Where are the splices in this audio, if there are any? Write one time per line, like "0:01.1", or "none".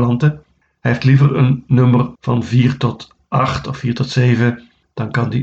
0:02.1